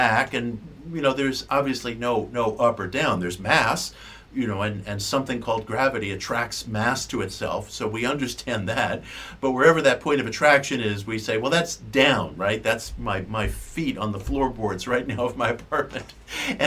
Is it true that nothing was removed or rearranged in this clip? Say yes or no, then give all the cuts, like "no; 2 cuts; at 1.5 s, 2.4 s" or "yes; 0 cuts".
yes; 0 cuts